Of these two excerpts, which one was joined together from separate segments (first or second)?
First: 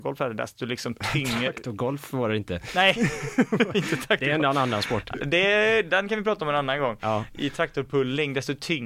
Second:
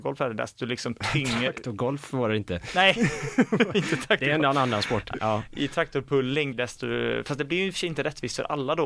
second